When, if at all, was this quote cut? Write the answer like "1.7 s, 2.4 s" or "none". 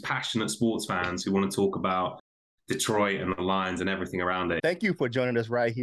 4.6 s